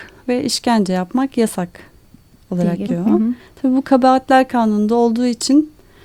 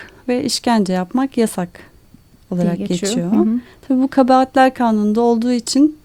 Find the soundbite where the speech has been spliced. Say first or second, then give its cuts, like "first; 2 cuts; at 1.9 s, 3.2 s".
first; 1 cut; at 2.9 s